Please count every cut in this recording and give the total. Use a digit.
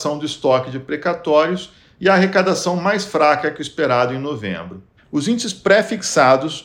1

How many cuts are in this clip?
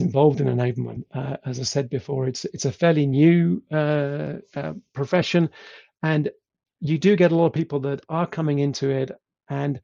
0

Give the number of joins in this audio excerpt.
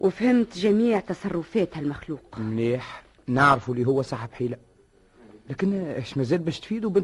0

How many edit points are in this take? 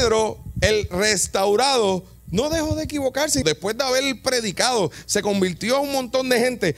1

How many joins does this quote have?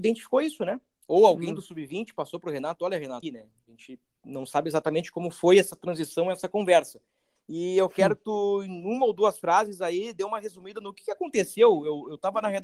2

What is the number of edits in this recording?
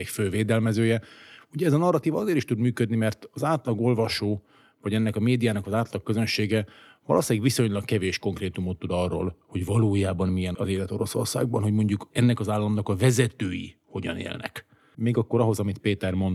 2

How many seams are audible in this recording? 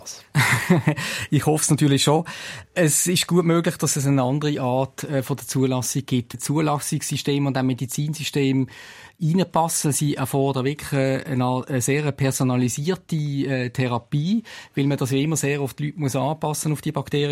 1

